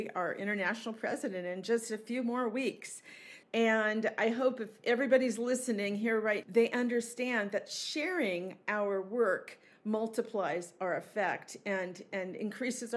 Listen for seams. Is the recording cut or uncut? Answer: cut